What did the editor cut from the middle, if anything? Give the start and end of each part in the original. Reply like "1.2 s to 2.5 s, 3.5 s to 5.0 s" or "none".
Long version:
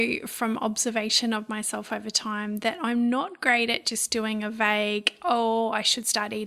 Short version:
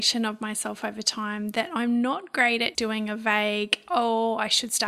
3.8 s to 4.1 s